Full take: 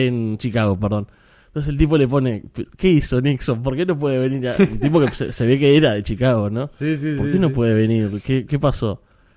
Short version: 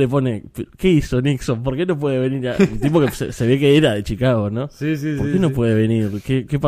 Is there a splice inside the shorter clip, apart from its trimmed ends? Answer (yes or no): no